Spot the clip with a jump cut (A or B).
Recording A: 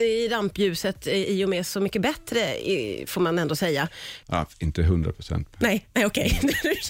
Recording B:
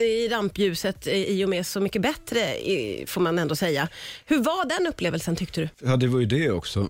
A